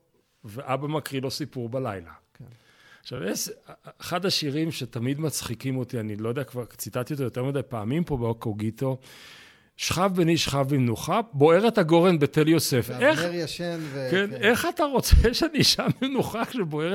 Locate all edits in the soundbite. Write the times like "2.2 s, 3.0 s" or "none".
none